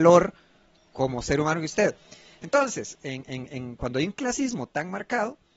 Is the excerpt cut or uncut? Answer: uncut